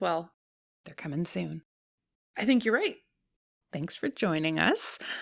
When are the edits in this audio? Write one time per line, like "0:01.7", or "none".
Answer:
0:02.2